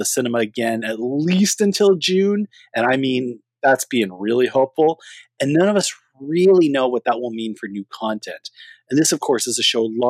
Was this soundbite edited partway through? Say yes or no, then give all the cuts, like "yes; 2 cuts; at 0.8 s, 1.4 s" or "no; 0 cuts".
no; 0 cuts